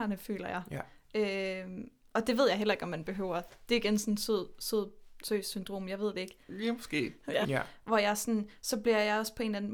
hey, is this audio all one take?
no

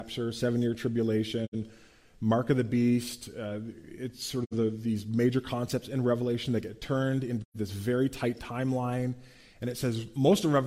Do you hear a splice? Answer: no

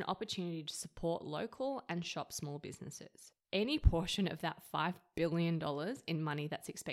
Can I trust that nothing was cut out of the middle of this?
yes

